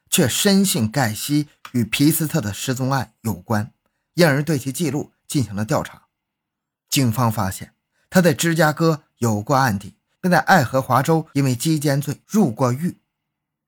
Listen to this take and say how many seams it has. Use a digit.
0